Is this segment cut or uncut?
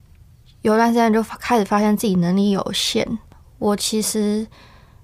uncut